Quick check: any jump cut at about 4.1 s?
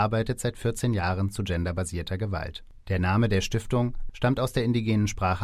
yes; 1 cut; at 4.1 s

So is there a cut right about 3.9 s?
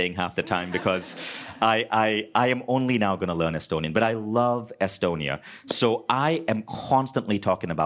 no; 0 cuts

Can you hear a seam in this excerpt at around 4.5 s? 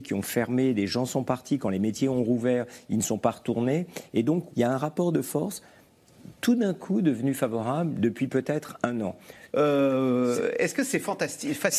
yes; 2 cuts; at 4.5 s, 9.5 s

